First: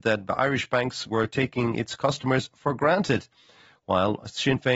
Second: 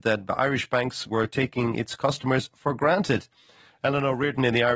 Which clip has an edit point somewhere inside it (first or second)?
second